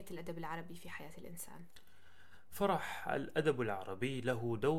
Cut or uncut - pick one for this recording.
uncut